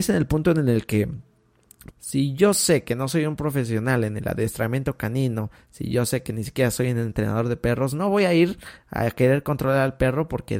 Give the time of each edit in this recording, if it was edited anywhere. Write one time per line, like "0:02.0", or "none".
0:01.9